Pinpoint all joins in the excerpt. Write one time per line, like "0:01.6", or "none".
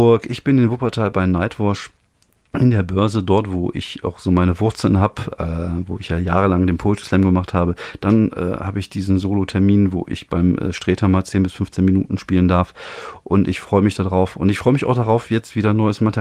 none